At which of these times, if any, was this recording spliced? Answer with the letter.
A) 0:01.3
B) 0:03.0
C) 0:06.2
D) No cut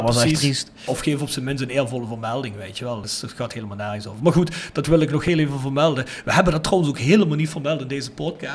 D